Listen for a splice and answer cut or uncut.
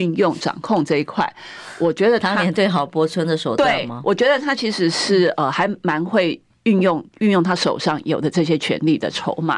uncut